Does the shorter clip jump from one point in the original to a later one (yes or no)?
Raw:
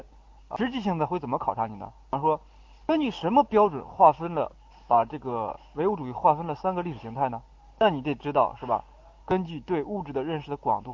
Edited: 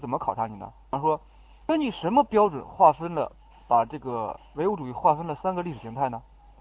no